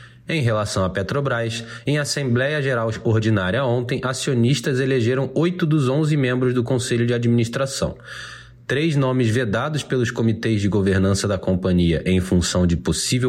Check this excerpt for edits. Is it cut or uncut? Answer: uncut